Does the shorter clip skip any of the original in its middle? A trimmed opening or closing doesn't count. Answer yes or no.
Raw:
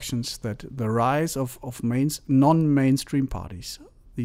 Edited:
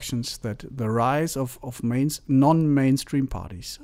no